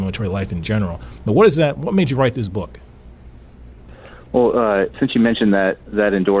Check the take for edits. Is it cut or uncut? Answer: cut